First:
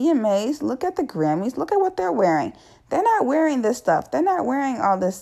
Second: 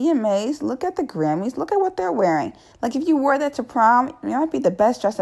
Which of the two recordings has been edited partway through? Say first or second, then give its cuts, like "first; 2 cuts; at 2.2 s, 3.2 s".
second; 1 cut; at 2.7 s